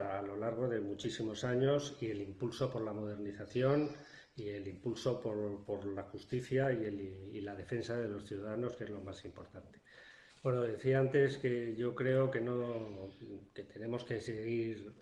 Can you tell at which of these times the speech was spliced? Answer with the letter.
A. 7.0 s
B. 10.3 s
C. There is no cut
B